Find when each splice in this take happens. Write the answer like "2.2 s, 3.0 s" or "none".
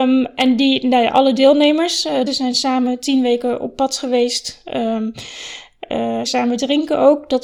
2.3 s, 6.3 s